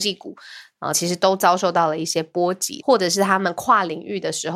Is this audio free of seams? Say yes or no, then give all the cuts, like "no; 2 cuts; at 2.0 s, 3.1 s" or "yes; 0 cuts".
no; 2 cuts; at 0.9 s, 2.8 s